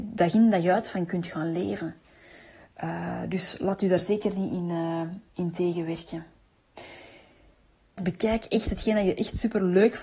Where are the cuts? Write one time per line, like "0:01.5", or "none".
0:05.3
0:08.0